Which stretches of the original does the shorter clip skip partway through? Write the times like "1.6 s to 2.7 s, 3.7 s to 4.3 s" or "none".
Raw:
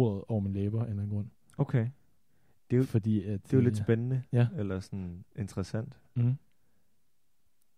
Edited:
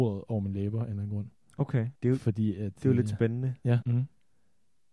2.0 s to 2.6 s, 4.5 s to 6.1 s